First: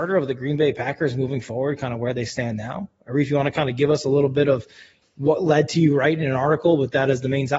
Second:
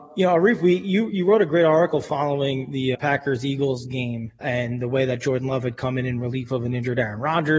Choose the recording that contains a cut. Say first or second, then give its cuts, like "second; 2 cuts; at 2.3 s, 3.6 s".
second; 2 cuts; at 2.9 s, 4.4 s